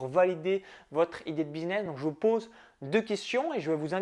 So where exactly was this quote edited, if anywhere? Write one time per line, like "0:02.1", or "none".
none